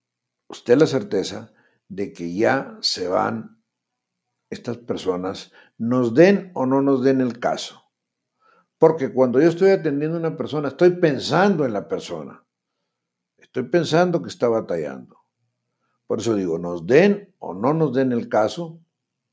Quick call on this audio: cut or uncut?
uncut